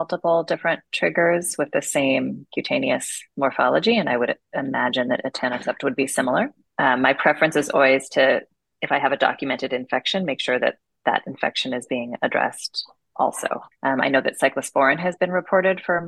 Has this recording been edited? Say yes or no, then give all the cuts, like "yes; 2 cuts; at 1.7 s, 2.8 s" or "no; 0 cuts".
yes; 1 cut; at 13.7 s